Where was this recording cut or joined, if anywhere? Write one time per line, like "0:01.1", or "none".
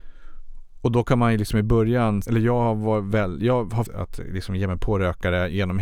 0:02.2
0:03.8

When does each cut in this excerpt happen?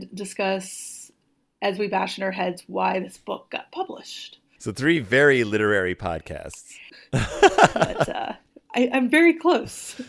0:06.9

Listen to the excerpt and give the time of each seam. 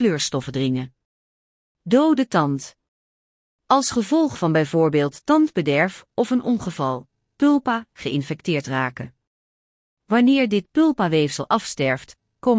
0:07.3

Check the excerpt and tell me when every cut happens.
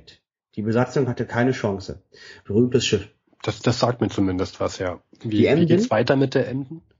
0:02.4

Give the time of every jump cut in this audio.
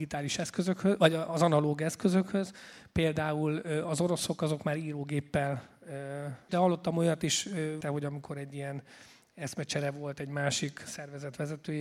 0:06.5
0:07.8

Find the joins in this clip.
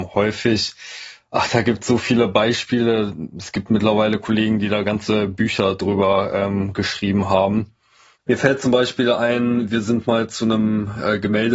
none

